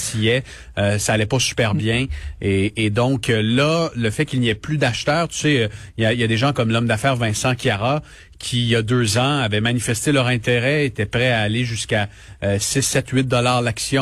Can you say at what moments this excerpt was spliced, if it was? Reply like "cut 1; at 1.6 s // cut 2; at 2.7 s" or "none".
none